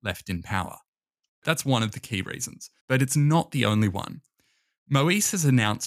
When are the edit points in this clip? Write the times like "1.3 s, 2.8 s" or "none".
1.3 s, 2.8 s